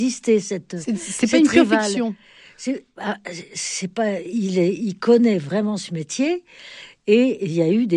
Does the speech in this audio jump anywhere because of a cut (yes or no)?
no